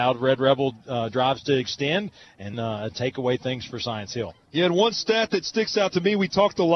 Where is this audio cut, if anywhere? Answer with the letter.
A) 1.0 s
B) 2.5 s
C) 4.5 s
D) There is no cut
B